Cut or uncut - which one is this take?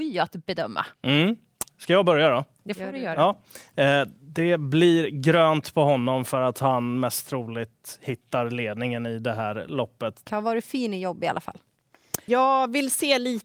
cut